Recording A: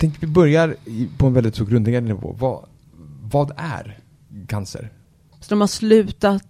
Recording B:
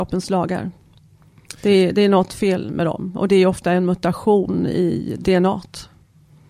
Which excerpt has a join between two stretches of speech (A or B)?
A